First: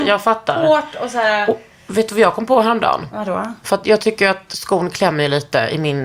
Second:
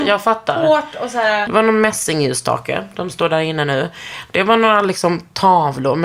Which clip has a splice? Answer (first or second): second